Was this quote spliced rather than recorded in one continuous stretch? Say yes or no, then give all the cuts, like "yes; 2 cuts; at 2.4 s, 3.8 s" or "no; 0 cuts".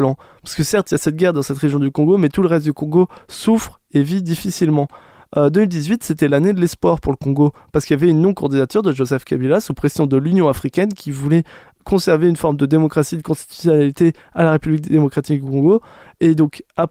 no; 0 cuts